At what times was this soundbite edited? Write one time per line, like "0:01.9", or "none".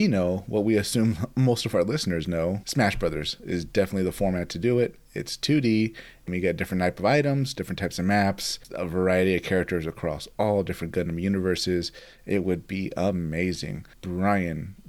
0:13.9